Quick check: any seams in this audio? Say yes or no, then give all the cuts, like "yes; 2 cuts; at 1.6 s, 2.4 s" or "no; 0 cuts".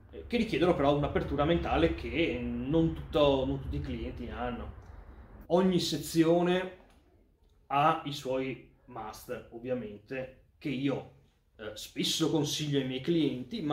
yes; 1 cut; at 5.4 s